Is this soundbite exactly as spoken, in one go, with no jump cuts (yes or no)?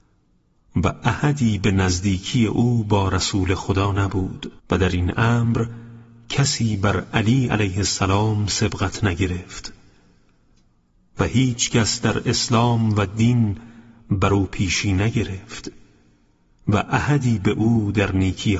no